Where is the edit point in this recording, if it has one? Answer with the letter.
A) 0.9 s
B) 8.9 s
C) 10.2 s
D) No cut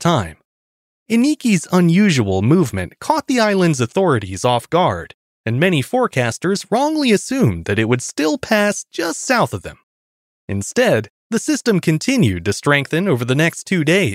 D